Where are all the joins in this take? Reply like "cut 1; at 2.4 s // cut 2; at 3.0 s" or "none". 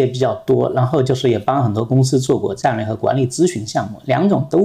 none